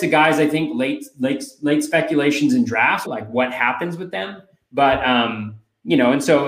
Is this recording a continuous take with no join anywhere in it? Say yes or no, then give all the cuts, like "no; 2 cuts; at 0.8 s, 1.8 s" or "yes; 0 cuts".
no; 1 cut; at 3.0 s